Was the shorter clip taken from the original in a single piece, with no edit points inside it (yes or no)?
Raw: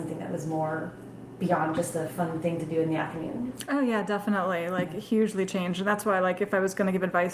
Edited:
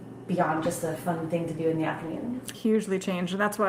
no